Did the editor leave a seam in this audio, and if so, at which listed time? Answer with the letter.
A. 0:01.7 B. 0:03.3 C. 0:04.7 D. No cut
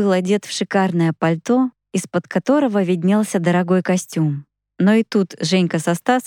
C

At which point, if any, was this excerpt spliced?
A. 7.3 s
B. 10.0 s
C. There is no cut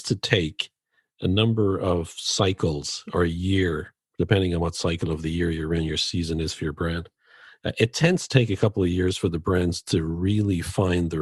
C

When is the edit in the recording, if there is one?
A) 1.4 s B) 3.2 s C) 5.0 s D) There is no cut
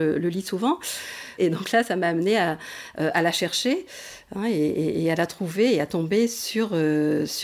A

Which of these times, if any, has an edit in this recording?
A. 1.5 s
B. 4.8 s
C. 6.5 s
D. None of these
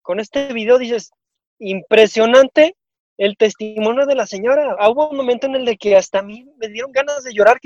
B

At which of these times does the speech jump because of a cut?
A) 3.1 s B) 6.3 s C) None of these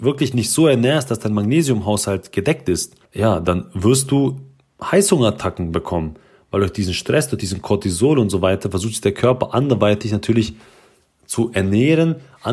A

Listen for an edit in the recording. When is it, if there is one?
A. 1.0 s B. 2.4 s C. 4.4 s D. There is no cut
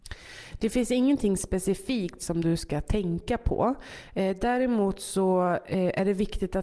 D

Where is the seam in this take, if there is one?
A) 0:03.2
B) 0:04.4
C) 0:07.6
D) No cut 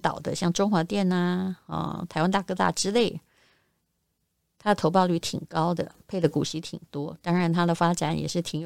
D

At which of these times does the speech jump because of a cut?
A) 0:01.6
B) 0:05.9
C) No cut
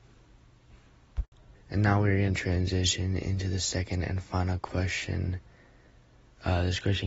A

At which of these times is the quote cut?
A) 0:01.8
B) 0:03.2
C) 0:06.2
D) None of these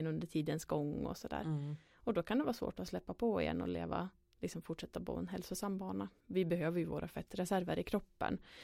C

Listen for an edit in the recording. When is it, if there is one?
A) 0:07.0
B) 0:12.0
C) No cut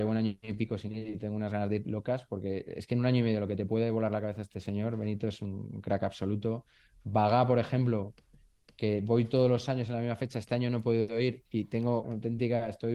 B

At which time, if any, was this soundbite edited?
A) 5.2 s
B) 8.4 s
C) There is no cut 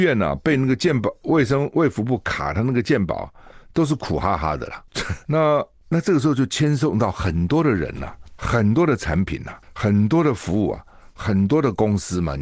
A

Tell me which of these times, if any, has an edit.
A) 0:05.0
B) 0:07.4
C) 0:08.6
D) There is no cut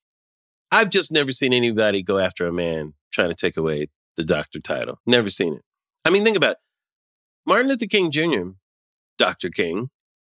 A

